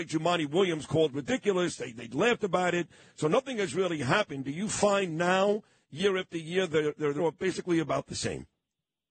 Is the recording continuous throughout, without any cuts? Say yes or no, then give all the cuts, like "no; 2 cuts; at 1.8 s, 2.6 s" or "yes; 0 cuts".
no; 1 cut; at 7.2 s